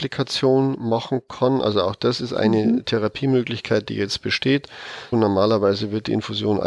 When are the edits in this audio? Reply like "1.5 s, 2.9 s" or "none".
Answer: 5.1 s